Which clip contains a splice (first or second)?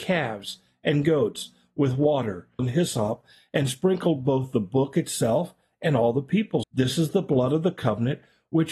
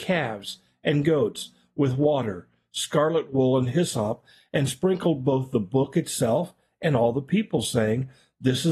first